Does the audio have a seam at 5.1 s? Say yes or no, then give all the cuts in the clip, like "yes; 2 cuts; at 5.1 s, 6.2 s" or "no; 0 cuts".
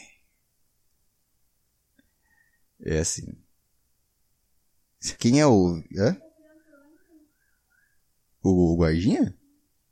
yes; 1 cut; at 5.1 s